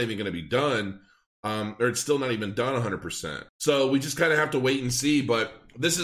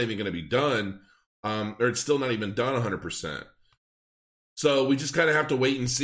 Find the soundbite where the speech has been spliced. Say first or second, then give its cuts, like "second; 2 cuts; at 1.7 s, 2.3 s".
first; 1 cut; at 3.5 s